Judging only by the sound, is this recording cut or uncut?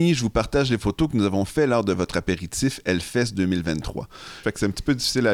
cut